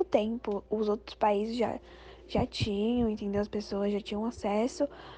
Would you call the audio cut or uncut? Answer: uncut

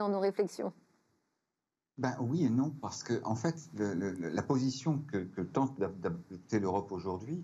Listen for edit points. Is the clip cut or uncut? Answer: uncut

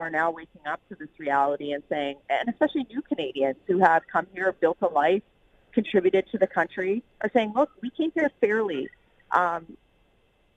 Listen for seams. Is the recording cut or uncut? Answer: uncut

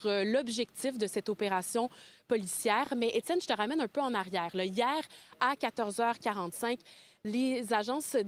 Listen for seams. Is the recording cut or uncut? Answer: uncut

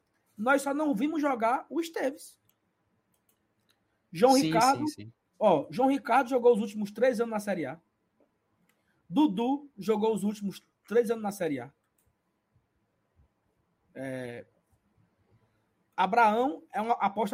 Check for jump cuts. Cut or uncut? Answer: uncut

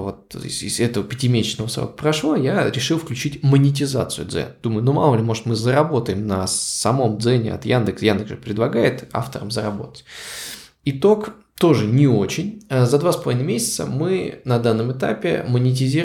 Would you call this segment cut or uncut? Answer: uncut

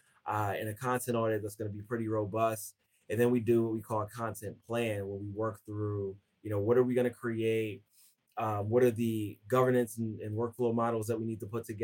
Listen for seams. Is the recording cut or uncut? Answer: uncut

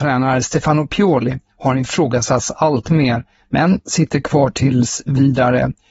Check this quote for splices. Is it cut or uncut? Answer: uncut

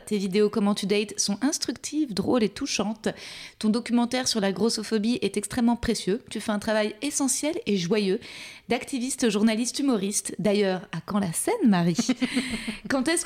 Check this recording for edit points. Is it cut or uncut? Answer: uncut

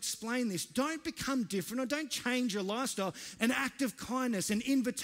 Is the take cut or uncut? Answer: cut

